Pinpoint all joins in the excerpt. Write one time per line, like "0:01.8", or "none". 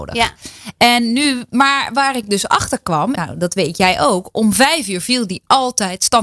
0:03.1